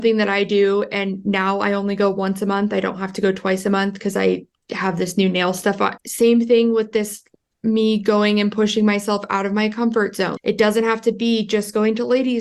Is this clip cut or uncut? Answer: cut